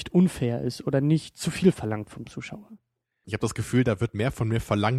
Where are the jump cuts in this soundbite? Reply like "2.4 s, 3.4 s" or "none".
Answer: 3.2 s

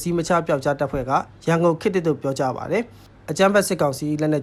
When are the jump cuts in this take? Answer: none

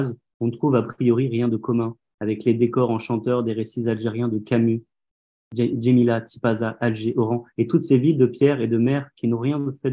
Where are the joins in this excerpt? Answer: none

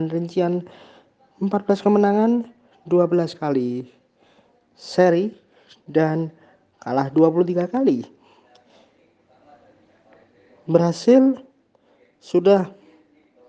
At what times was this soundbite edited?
none

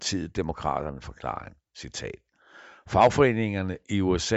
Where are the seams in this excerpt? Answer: none

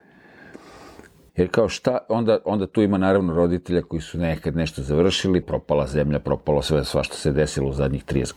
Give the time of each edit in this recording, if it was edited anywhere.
1.3 s, 5.4 s

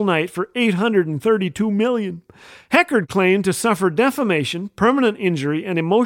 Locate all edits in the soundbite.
none

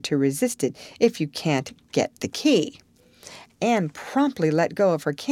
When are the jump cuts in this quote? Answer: 3.5 s

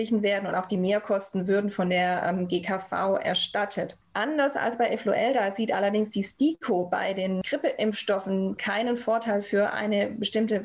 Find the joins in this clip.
8.6 s

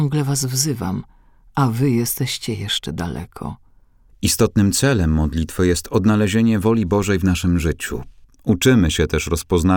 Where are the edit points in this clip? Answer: 4.1 s, 8.2 s

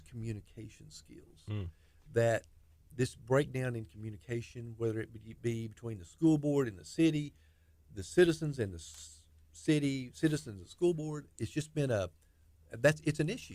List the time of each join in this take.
none

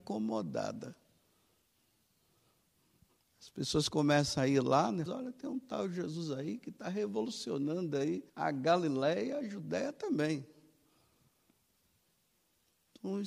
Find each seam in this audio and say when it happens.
5.1 s, 8.3 s

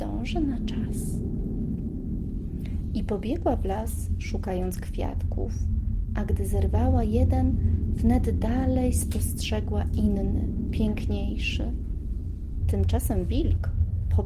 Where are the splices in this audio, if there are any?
12.6 s

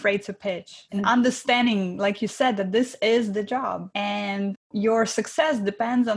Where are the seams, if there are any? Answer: none

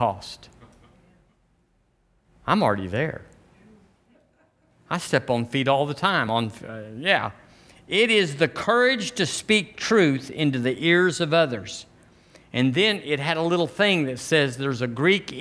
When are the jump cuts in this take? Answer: none

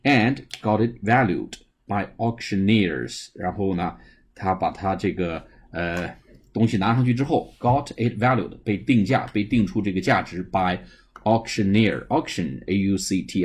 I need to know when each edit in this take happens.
none

